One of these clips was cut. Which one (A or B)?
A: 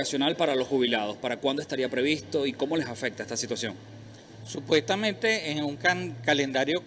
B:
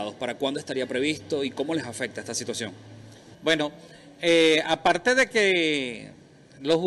B